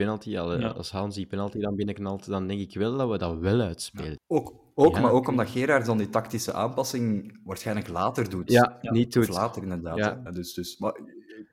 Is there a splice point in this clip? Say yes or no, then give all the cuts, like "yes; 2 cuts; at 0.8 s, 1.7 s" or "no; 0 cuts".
yes; 2 cuts; at 4.2 s, 10.3 s